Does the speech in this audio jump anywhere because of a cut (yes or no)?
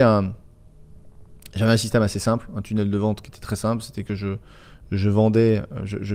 no